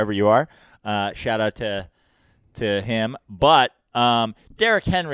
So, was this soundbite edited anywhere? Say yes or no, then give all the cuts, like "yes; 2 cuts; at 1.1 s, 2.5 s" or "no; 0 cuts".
no; 0 cuts